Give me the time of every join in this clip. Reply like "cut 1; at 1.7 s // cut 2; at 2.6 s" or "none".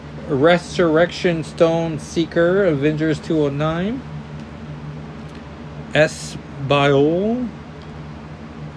none